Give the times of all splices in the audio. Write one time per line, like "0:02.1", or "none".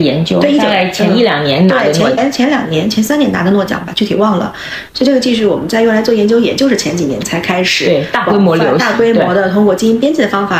0:02.2
0:04.9